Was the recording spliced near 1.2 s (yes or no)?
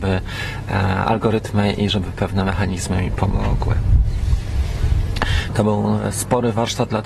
no